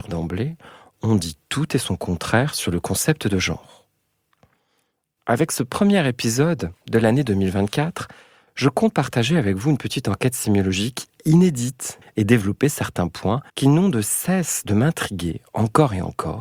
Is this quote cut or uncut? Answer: cut